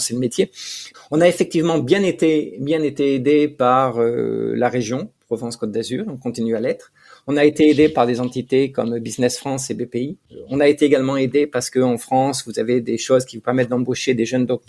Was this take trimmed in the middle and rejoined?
yes; 1 cut; at 0.9 s

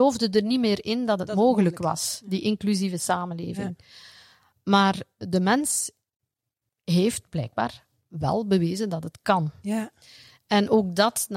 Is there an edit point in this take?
no; 0 cuts

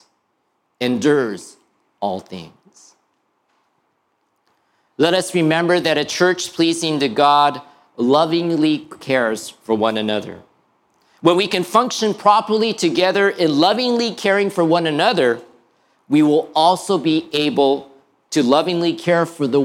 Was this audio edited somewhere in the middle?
no; 0 cuts

